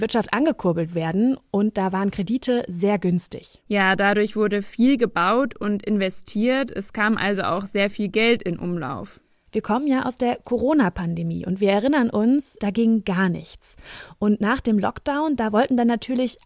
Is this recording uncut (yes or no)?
no